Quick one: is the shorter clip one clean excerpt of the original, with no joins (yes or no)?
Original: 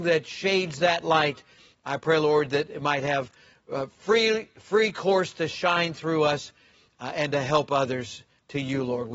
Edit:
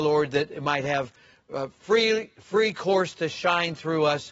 yes